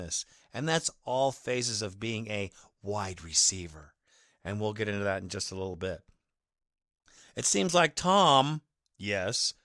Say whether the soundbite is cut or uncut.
uncut